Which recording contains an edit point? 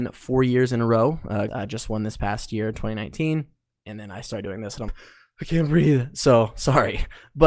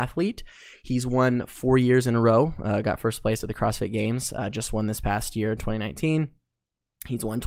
first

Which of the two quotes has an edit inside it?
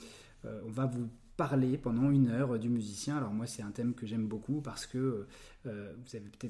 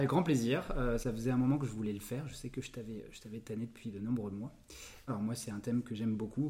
second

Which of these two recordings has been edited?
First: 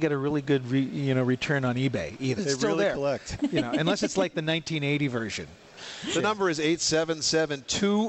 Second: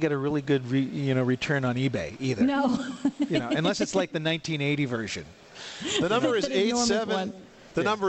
first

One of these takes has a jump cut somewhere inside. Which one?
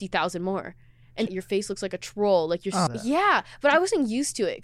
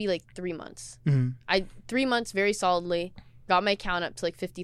first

